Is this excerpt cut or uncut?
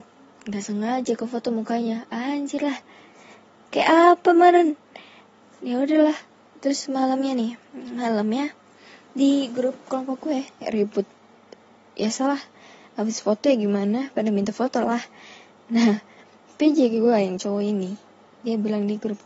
uncut